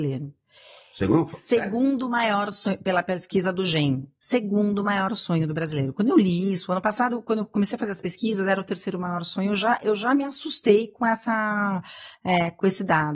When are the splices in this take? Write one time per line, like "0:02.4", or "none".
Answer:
none